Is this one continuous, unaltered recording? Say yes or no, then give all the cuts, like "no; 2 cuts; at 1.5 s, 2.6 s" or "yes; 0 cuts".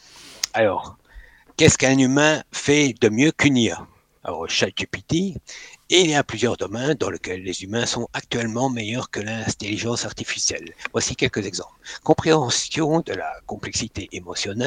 yes; 0 cuts